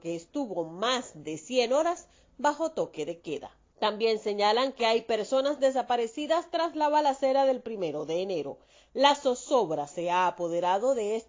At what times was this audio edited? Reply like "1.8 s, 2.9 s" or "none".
3.7 s